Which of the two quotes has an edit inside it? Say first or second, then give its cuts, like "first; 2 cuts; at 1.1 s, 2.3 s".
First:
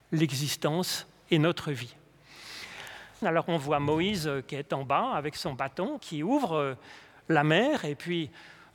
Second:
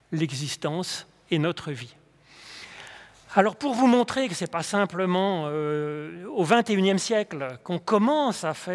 first; 2 cuts; at 3.2 s, 6.0 s